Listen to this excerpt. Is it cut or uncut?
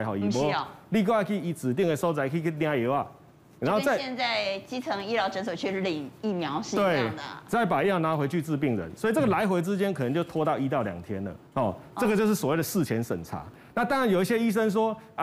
cut